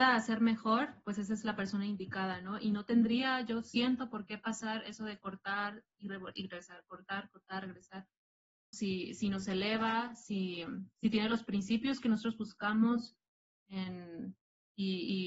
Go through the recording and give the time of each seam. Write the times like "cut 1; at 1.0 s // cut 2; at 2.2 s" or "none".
cut 1; at 8.7 s